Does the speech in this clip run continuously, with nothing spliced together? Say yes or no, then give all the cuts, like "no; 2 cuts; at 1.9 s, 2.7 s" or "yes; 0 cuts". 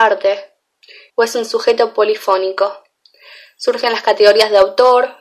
no; 1 cut; at 1.1 s